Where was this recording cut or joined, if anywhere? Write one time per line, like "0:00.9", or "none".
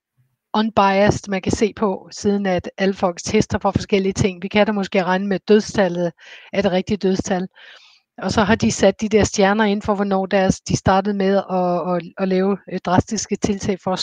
none

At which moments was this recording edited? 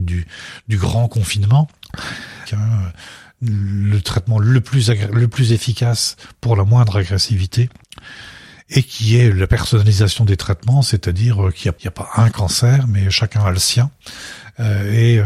0:02.5
0:11.8

